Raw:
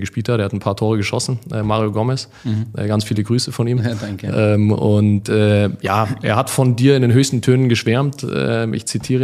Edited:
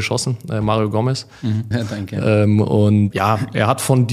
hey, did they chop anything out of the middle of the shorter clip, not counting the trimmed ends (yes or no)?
yes